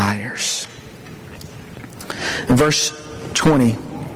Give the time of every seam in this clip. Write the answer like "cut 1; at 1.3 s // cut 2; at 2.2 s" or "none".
none